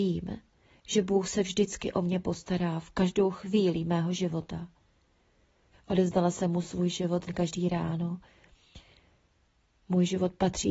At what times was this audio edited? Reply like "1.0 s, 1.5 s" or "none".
5.7 s, 7.3 s